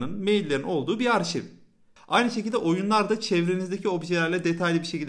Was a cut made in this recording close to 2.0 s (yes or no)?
yes